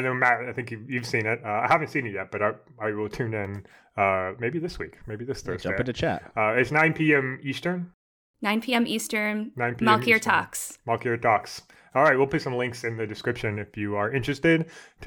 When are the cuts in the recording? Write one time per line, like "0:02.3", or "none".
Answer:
none